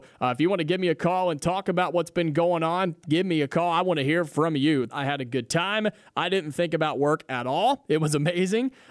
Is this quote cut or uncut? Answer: cut